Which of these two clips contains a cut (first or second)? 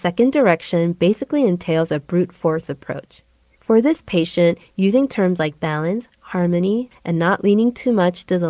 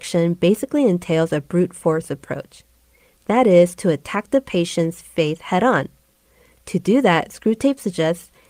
first